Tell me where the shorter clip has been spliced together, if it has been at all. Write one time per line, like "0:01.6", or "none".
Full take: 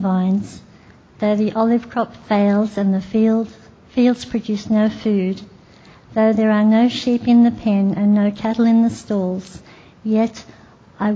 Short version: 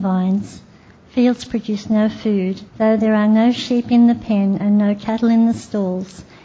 0:01.0
0:02.7